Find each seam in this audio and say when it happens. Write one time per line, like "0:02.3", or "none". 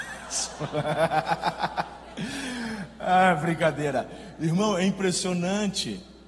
none